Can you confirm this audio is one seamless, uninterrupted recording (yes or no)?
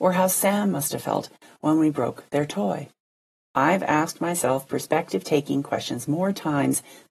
no